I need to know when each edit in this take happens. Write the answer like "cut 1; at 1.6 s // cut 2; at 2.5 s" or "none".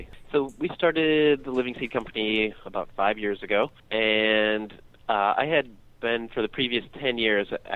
cut 1; at 3.8 s